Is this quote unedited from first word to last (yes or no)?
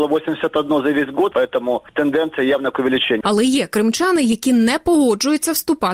no